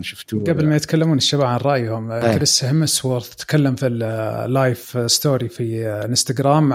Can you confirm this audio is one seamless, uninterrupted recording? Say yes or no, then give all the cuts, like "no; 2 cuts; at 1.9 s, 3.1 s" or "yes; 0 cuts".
yes; 0 cuts